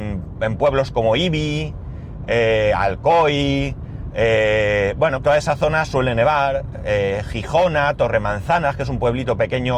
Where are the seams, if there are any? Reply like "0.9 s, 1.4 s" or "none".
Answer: 5.2 s